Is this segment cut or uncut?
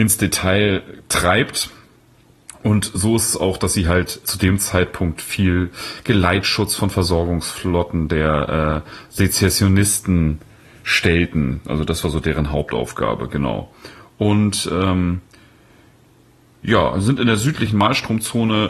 cut